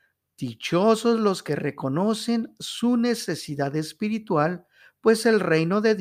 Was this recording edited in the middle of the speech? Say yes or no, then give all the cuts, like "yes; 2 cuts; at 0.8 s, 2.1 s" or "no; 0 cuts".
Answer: no; 0 cuts